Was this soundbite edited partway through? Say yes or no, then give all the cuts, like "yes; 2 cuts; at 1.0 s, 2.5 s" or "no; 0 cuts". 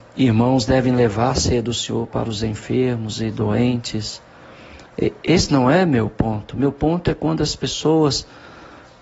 no; 0 cuts